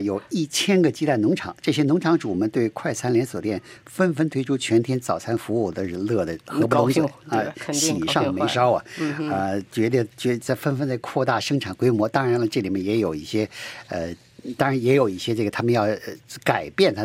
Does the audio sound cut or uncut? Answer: uncut